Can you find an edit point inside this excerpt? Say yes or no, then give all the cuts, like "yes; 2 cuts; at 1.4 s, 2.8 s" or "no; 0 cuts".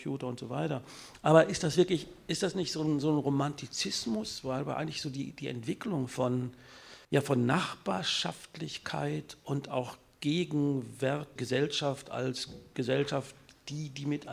yes; 2 cuts; at 7.0 s, 11.4 s